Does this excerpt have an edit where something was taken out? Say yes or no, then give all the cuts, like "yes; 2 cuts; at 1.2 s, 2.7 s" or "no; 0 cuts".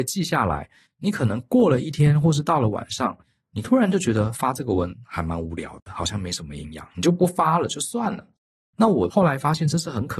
no; 0 cuts